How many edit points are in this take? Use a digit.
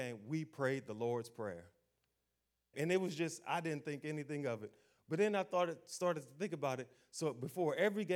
1